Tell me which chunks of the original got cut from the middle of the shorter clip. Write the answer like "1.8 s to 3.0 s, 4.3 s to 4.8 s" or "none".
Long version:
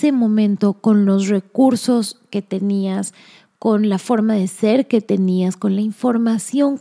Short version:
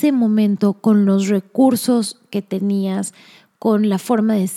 none